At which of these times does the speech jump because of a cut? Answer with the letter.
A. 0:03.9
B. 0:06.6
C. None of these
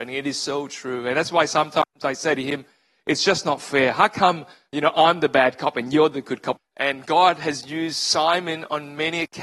B